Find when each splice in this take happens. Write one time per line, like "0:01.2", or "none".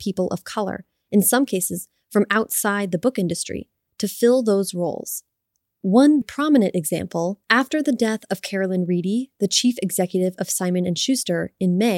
0:06.2
0:07.4